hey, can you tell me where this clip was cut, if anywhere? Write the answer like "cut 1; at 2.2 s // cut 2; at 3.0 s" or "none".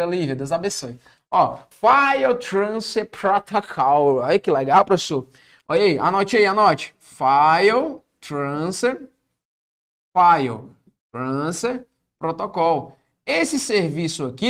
cut 1; at 1.7 s